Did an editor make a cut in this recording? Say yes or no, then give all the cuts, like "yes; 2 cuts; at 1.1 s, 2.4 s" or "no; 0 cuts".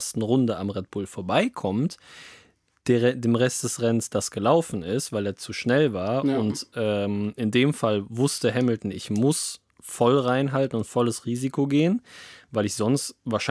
no; 0 cuts